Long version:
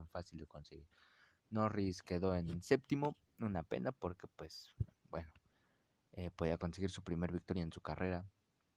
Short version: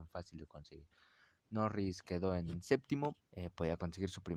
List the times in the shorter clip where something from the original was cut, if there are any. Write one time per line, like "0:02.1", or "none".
0:03.2